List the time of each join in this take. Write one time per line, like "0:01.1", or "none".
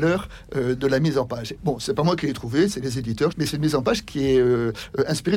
0:01.6
0:03.3